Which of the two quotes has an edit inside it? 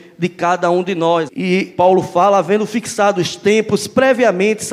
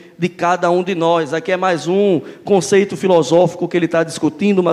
first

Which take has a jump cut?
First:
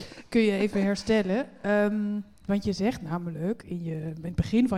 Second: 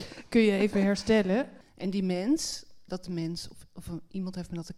second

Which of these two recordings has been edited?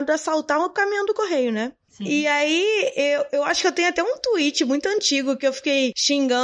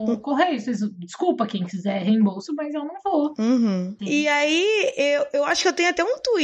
second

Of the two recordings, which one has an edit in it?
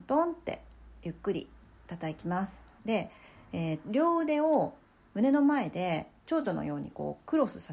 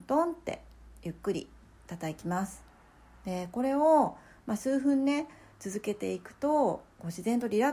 first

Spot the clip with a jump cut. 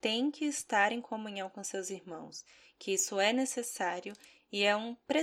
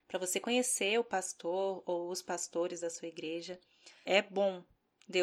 second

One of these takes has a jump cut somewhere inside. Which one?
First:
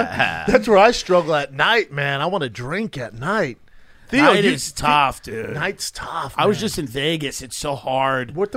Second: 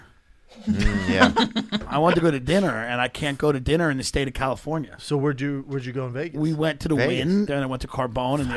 second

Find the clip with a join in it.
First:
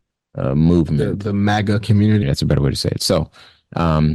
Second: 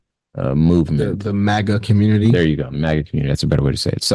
first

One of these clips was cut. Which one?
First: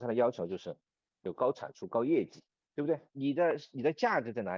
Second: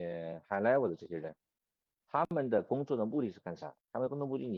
first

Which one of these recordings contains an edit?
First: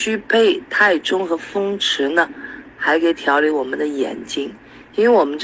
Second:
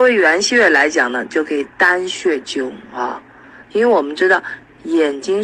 second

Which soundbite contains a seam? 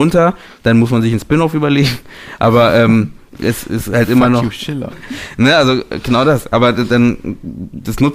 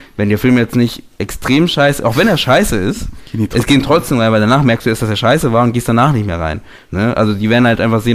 first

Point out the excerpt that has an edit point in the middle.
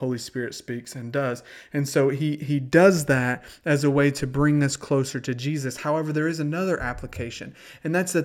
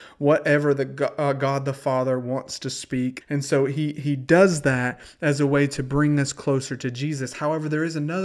second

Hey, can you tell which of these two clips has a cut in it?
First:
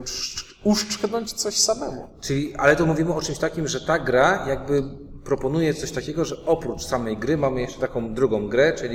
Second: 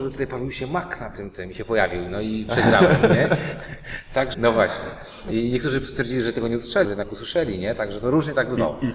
second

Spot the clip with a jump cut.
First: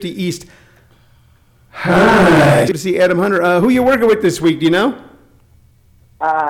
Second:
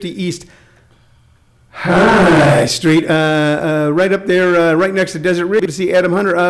first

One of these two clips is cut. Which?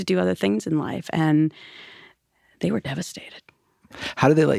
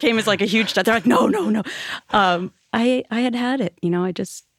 second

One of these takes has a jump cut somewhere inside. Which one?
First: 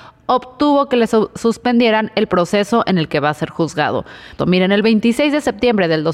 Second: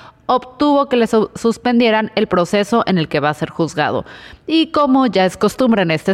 first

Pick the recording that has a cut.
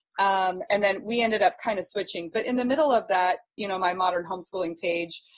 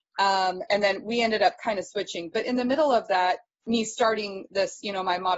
first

